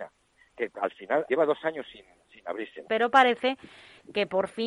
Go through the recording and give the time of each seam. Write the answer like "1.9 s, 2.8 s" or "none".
1.3 s, 2.8 s